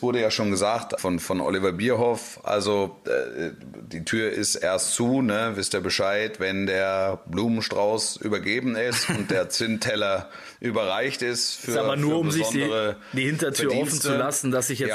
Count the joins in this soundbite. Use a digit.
1